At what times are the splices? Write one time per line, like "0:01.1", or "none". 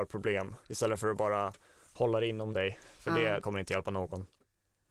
none